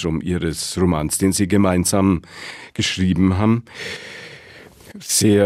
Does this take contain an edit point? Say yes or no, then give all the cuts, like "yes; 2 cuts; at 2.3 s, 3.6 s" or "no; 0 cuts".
no; 0 cuts